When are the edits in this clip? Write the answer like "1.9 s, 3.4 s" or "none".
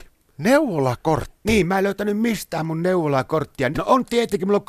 3.7 s